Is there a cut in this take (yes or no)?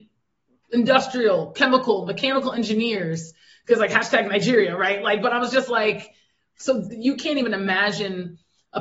no